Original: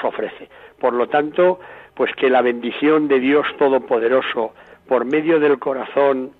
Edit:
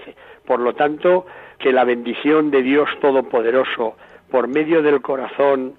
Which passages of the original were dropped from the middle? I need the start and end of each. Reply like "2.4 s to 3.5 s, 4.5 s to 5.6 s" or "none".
1.9 s to 2.2 s